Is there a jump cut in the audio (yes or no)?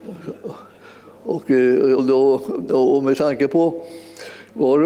yes